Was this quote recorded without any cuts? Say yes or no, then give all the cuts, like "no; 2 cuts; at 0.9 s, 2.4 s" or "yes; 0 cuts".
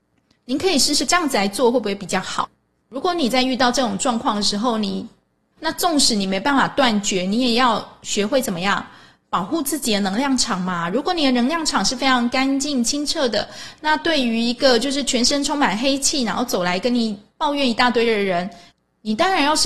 no; 2 cuts; at 2.8 s, 5.6 s